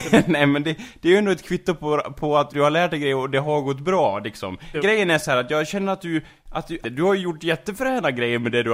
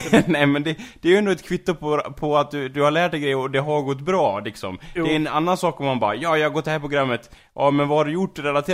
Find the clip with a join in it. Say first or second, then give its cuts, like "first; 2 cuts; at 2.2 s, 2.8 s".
first; 3 cuts; at 2.5 s, 4.7 s, 6.8 s